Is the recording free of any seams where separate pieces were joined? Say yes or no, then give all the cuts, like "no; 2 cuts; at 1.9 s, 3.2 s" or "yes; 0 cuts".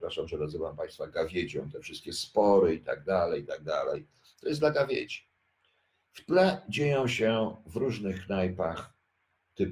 yes; 0 cuts